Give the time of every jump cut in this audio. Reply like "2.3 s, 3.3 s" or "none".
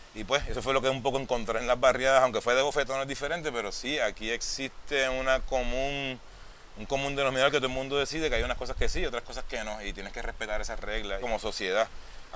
11.2 s